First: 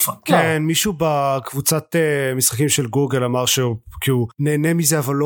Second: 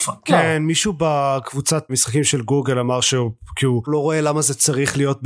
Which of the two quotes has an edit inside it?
second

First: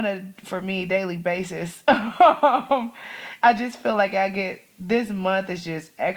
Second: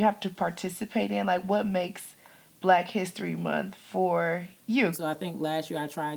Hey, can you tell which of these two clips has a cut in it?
second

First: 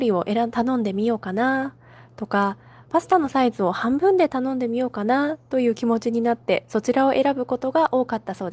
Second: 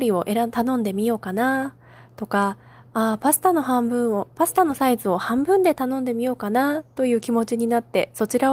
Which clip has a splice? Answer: first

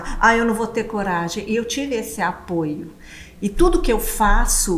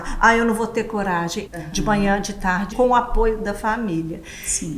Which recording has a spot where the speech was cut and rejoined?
second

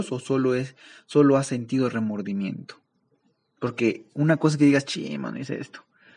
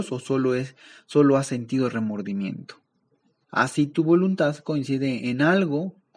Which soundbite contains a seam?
second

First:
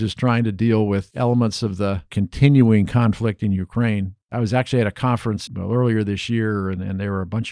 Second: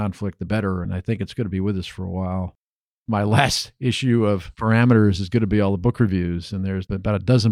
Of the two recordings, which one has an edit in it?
first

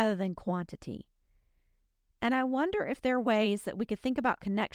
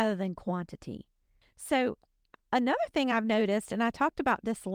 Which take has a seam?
second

